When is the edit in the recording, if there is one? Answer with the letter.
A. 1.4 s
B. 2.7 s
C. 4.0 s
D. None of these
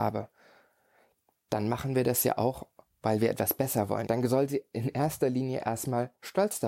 C